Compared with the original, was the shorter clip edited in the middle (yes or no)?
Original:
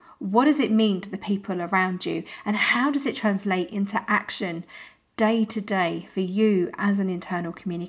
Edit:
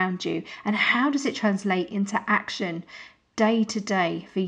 no